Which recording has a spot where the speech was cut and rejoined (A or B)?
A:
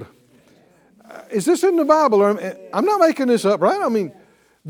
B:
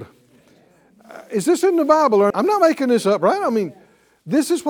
B